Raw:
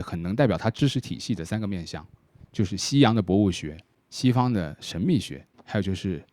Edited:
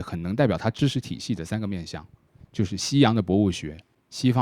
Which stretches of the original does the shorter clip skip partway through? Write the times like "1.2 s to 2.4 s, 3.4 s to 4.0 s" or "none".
none